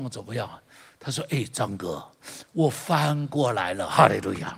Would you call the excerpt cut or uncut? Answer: uncut